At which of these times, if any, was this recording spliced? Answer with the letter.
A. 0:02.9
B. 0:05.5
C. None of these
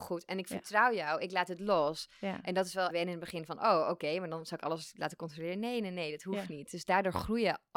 A